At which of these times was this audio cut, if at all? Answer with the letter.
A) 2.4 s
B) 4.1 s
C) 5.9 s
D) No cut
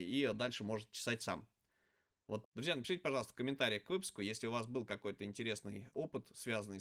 A